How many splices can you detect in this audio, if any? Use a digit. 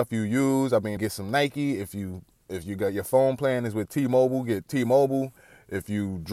1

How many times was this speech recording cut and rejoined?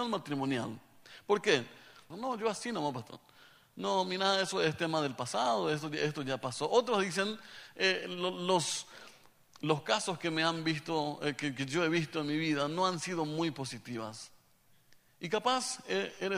1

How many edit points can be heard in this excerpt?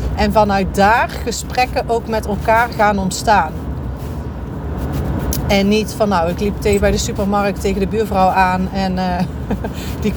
0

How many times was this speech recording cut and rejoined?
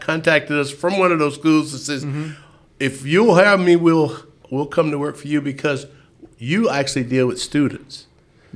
0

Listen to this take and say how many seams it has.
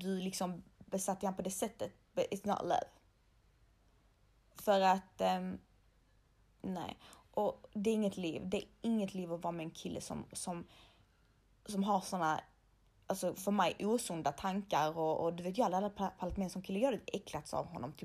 0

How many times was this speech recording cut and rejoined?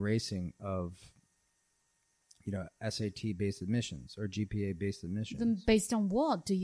0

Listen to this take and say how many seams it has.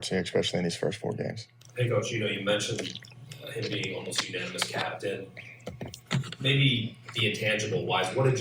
1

